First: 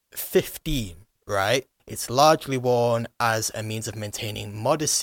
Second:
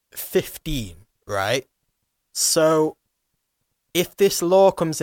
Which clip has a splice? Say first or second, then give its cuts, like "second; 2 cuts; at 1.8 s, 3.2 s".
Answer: first; 1 cut; at 1.8 s